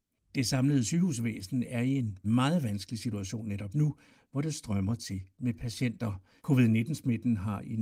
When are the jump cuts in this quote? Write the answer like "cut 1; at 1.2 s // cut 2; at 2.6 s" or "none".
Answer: cut 1; at 2.2 s // cut 2; at 6.4 s